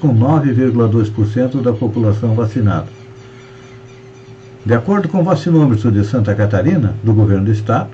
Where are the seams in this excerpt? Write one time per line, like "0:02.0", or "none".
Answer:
0:04.6